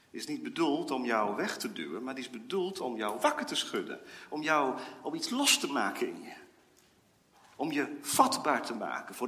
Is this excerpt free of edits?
yes; 0 cuts

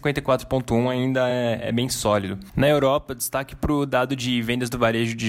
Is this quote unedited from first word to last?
yes; 0 cuts

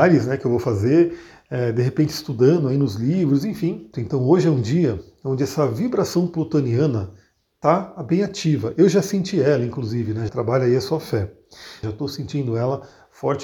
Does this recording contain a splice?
yes; 3 cuts; at 3.9 s, 10.3 s, 11.8 s

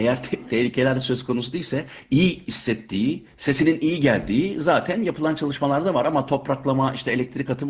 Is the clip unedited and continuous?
yes; 0 cuts

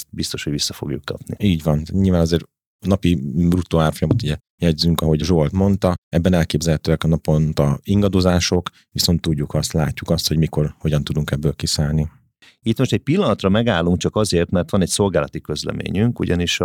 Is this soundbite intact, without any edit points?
yes; 0 cuts

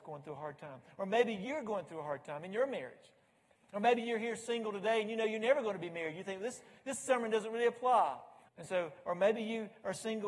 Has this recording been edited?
yes; 2 cuts; at 3.5 s, 8.5 s

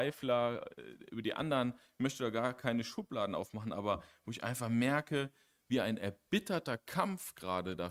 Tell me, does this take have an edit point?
no; 0 cuts

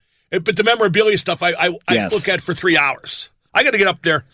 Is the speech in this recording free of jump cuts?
yes; 0 cuts

